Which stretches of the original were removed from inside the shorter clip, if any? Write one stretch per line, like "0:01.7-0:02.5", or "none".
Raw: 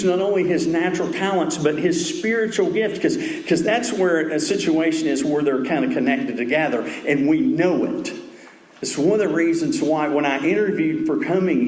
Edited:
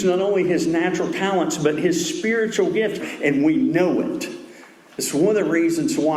0:03.0-0:06.8